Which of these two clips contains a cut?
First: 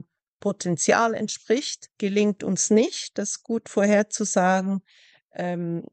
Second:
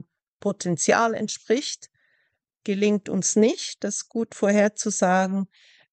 first; 1 cut; at 1.9 s

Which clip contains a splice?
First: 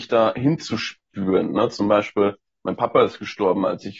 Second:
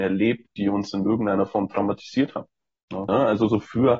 second; 1 cut; at 3.1 s

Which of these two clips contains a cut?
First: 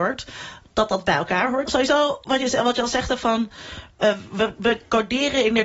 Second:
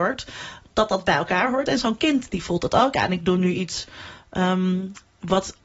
first; 1 cut; at 1.7 s

